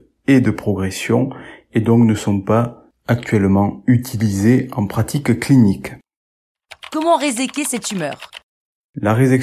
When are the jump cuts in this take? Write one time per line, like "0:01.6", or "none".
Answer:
none